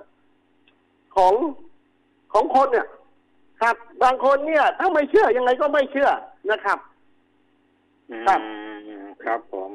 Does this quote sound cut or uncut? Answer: uncut